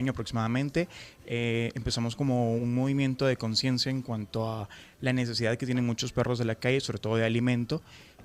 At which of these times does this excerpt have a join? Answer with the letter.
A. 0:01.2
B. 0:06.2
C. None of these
C